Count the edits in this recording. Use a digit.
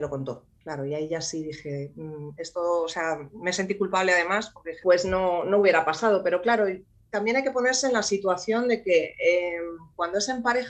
1